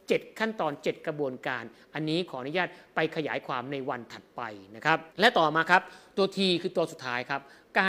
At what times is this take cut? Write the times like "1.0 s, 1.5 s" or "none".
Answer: 5.1 s